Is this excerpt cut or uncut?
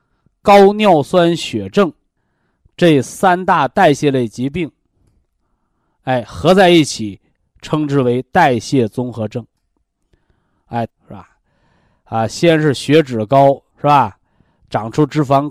cut